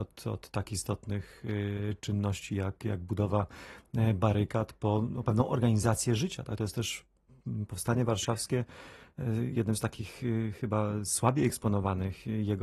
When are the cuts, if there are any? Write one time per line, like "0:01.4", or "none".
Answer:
none